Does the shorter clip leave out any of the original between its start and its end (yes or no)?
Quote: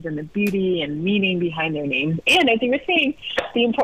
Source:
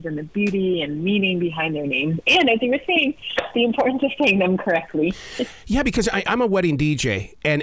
no